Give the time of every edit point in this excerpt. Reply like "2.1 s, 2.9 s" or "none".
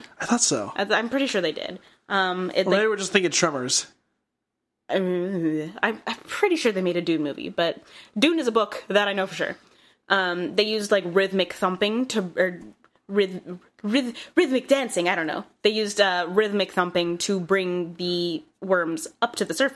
none